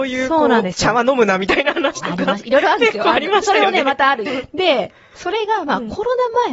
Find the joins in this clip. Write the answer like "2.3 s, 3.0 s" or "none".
4.3 s

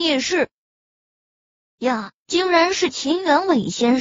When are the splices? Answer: none

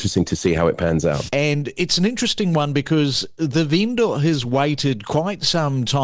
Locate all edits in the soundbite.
1.3 s

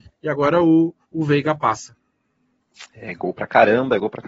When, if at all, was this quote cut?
1.0 s

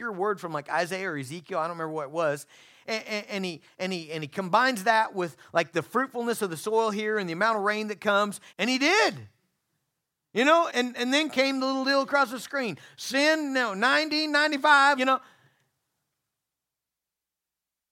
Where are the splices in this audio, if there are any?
8.5 s, 10.7 s, 15.0 s

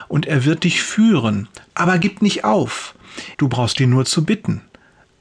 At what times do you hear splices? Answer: 1.7 s, 3.3 s

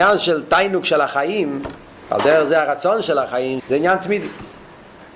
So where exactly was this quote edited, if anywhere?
3.6 s

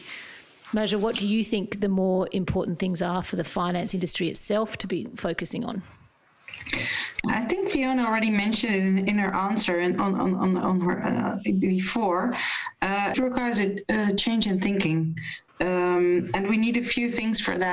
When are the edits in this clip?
13.1 s, 15.5 s

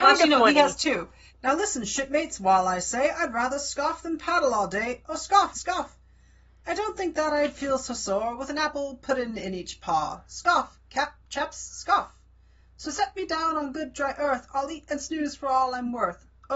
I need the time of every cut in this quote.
1.3 s, 5.5 s

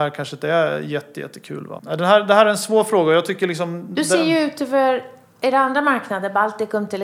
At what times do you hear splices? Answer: 1.8 s

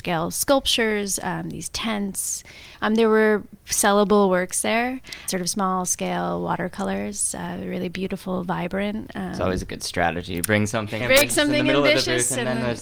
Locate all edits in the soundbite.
11.0 s

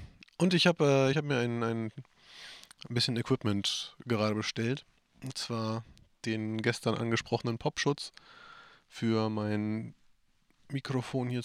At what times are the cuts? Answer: none

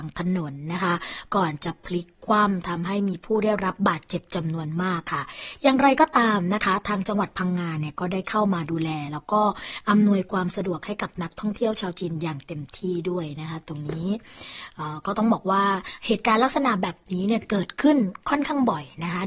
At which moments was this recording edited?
none

